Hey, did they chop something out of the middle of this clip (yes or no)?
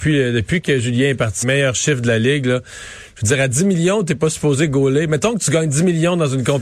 yes